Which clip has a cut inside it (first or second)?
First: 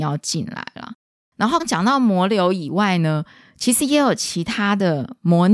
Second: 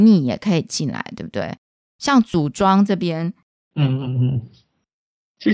first